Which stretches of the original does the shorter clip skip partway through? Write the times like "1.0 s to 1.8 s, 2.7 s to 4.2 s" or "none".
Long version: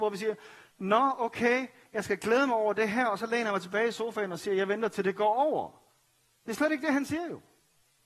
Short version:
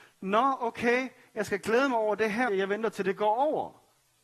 3.1 s to 4.5 s